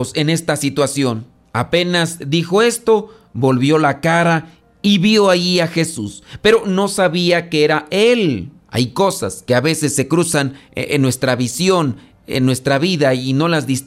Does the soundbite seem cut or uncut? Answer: cut